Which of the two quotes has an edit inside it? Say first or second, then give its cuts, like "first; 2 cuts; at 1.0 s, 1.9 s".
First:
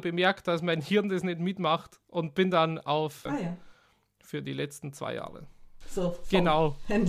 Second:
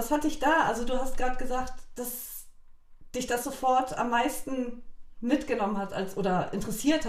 first; 2 cuts; at 3.3 s, 5.8 s